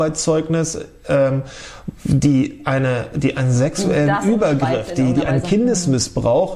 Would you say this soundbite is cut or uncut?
uncut